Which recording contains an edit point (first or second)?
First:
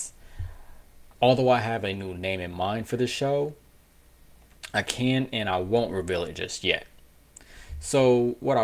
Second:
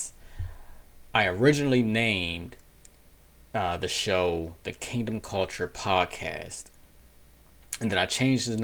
first